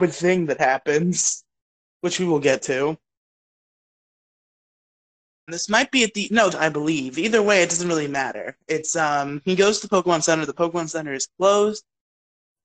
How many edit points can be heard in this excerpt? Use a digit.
2